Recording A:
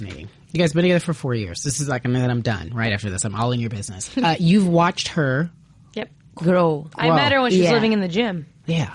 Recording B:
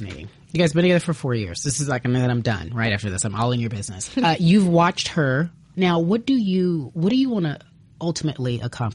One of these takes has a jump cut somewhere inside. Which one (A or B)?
B